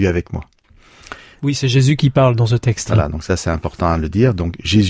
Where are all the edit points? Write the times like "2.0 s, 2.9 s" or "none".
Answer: 1.4 s